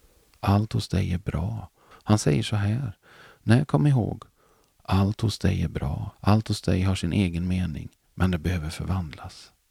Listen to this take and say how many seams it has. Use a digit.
2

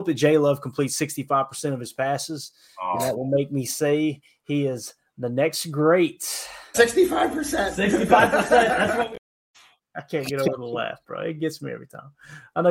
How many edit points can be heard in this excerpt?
0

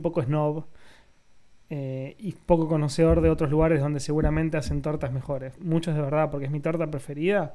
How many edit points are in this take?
1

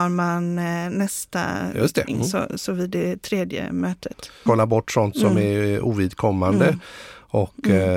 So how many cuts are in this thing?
2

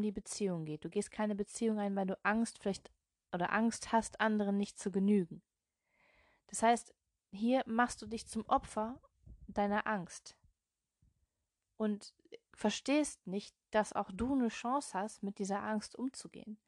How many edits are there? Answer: 0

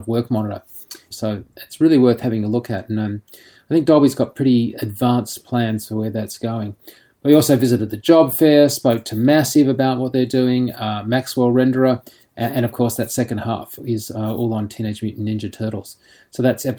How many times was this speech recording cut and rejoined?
1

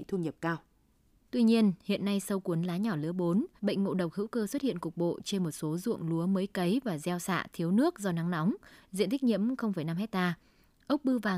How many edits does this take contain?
3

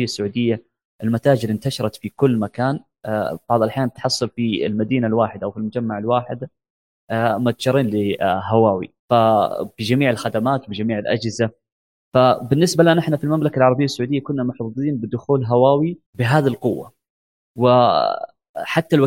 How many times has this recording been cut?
2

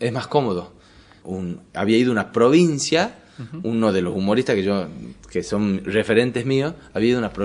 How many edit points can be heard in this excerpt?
1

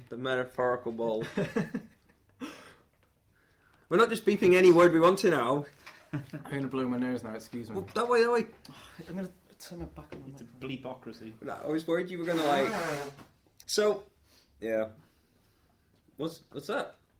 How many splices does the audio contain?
2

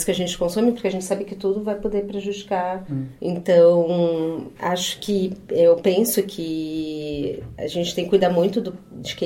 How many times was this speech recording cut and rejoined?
2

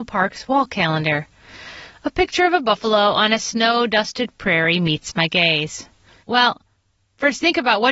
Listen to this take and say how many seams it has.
1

